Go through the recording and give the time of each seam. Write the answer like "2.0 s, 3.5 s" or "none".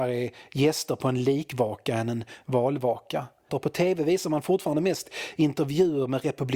3.5 s